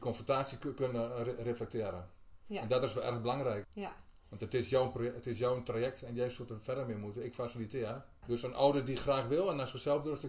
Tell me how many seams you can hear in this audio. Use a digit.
2